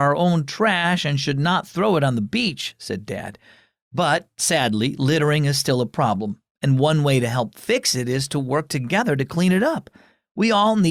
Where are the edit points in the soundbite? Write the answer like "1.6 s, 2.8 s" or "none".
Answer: none